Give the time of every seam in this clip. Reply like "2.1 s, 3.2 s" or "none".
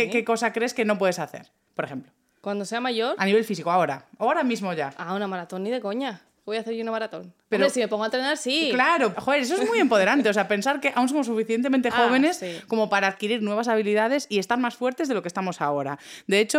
9.1 s